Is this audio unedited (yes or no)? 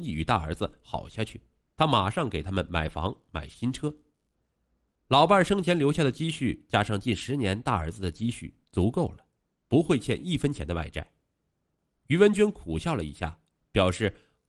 yes